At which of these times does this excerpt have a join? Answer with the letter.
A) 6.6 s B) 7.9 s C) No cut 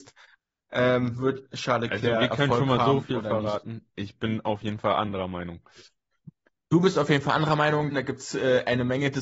B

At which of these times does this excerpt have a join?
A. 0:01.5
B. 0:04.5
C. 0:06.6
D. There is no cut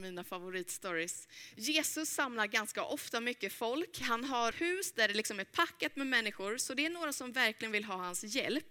B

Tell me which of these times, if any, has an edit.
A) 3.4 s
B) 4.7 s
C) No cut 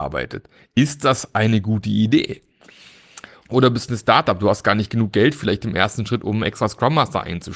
A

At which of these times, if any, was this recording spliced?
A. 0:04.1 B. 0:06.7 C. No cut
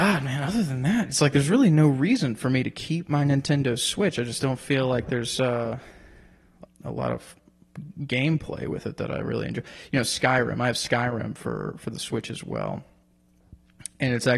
B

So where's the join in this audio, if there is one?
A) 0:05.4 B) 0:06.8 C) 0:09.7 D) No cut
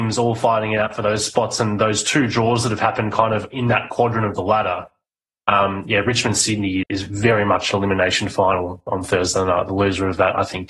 B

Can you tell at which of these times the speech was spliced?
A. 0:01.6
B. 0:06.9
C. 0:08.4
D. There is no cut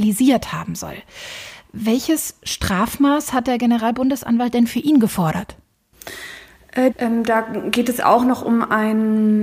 B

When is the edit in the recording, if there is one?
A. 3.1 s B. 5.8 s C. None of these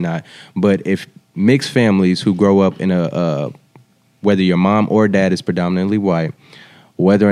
C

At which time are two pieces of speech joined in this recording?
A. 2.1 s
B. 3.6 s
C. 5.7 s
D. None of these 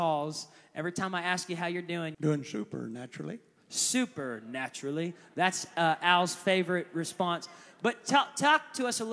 A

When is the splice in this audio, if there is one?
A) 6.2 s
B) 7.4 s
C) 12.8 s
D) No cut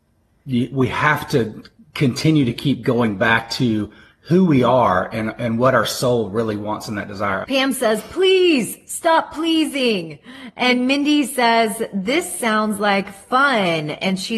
B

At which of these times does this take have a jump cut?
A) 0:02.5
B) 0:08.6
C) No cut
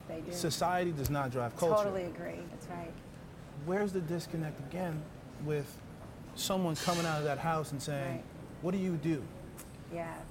A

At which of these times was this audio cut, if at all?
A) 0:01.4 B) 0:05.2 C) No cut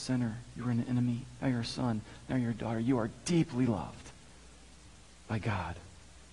A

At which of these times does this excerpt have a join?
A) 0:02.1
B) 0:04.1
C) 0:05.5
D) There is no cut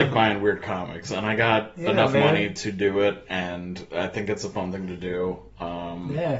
D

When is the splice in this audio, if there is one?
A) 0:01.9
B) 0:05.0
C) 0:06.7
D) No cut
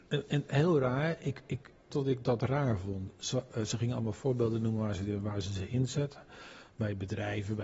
A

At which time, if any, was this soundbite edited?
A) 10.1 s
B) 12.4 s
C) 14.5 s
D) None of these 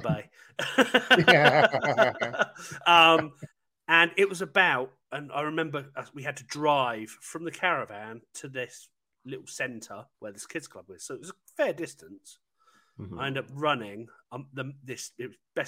A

